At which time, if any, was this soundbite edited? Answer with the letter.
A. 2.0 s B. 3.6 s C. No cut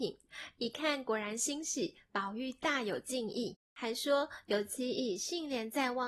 B